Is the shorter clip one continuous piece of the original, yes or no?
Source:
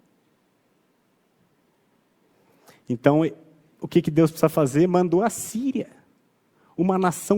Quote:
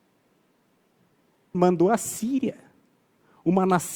no